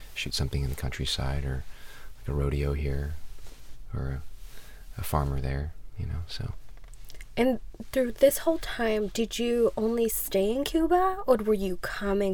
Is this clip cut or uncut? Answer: uncut